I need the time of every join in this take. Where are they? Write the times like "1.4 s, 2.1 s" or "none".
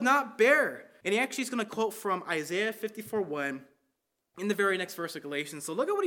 1.0 s